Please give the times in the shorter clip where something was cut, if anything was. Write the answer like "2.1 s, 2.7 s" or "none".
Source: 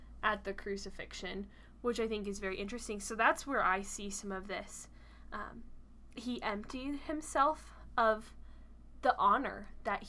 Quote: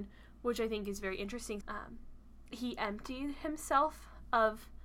1.6 s